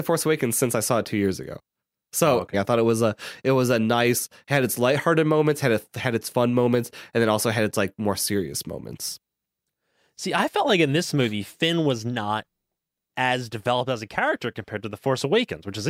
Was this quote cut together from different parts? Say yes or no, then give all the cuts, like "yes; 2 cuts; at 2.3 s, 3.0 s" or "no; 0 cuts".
yes; 1 cut; at 2.5 s